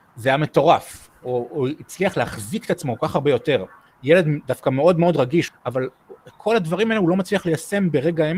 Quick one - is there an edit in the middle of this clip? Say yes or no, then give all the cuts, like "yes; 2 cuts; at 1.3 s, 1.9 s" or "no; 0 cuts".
yes; 2 cuts; at 3.9 s, 5.5 s